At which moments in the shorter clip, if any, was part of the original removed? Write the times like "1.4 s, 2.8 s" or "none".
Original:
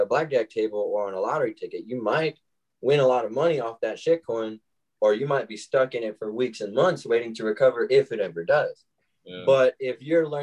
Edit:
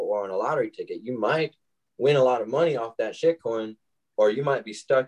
none